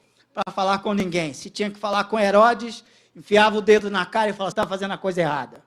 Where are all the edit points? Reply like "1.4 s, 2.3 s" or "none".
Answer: 4.5 s